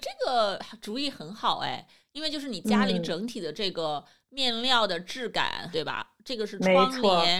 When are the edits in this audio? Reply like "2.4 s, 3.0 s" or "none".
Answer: 5.7 s